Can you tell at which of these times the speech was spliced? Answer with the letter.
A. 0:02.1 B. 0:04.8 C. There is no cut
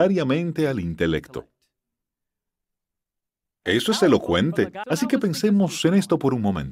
B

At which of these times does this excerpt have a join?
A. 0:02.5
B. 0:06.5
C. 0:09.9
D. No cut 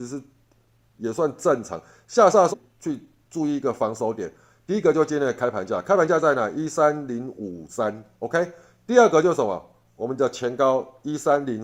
A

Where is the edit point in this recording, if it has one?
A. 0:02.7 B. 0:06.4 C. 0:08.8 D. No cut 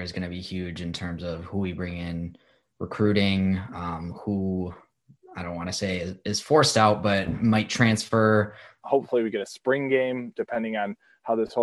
C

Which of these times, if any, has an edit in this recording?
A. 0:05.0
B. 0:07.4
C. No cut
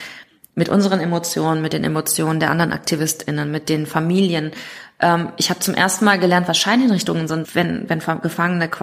B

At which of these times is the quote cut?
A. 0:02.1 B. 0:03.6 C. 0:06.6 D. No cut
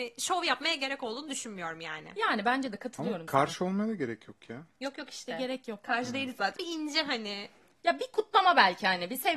C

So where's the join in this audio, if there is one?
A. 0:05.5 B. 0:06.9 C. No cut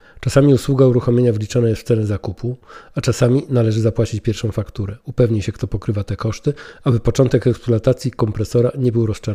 C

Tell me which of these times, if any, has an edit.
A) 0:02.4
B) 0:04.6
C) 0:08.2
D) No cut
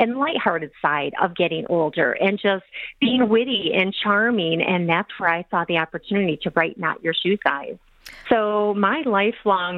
C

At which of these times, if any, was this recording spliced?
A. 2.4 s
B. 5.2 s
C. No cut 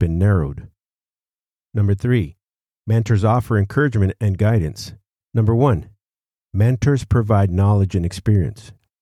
B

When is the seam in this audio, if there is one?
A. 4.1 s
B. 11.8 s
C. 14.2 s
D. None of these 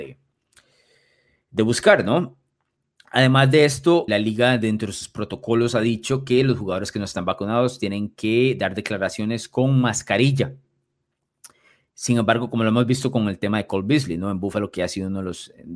A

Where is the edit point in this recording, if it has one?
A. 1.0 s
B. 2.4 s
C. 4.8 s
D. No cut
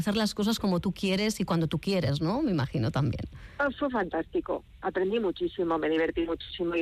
D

